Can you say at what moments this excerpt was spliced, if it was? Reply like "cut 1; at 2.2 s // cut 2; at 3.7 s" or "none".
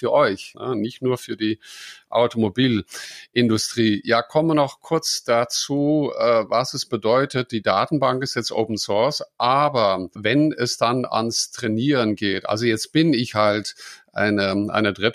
none